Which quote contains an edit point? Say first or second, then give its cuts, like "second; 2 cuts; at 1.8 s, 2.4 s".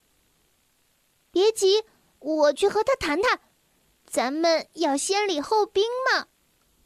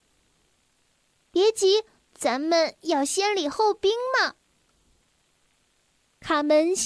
second; 1 cut; at 2.0 s